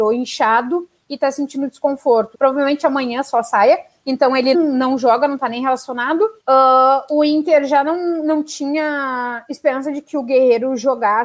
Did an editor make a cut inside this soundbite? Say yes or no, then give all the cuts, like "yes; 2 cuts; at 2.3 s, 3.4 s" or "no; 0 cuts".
yes; 3 cuts; at 2.3 s, 4.5 s, 6.4 s